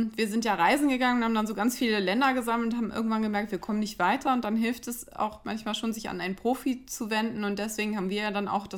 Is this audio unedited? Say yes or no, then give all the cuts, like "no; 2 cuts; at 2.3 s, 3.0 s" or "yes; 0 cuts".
yes; 0 cuts